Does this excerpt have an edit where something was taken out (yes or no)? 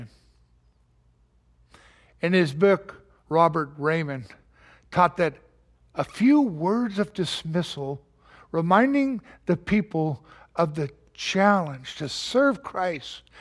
yes